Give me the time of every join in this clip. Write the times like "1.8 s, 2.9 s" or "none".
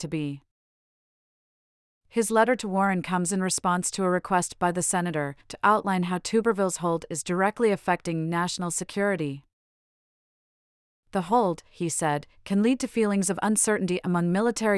5.4 s